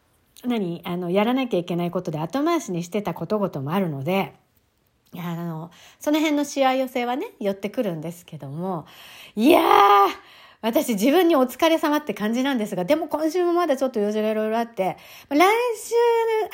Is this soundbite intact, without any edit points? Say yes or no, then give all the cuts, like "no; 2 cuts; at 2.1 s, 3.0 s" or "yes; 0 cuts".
yes; 0 cuts